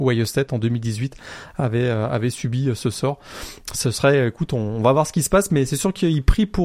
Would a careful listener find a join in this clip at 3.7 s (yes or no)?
no